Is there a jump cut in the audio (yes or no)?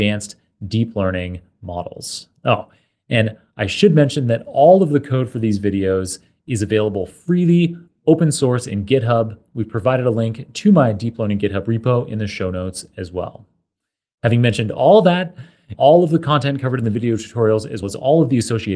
yes